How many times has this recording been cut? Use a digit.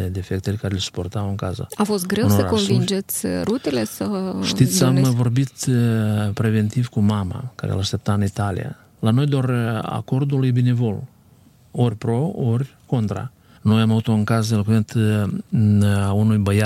2